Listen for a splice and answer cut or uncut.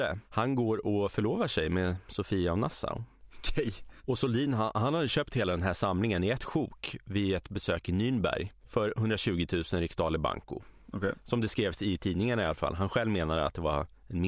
cut